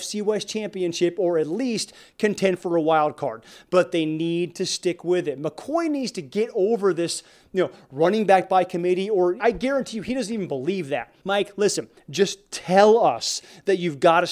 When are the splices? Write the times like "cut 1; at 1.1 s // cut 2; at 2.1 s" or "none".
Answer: cut 1; at 9.4 s // cut 2; at 11.2 s